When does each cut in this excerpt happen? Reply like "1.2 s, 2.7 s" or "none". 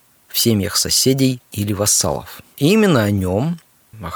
2.5 s